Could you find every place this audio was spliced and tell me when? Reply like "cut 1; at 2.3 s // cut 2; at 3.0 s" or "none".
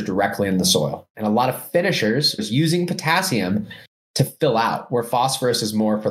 cut 1; at 1.1 s // cut 2; at 2.4 s